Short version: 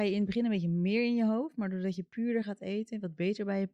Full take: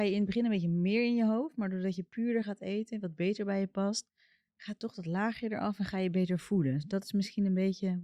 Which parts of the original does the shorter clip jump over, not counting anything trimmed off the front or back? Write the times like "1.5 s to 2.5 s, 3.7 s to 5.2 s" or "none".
none